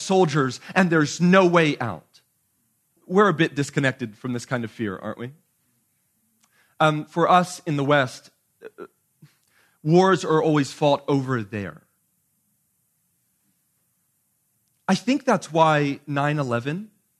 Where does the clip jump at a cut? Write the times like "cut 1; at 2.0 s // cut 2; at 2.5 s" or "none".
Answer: cut 1; at 3.0 s